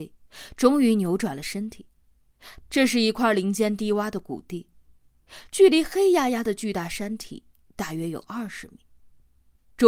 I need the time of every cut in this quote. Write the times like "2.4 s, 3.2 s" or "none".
2.6 s